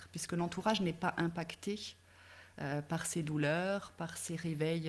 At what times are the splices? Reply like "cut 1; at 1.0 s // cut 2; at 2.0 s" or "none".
none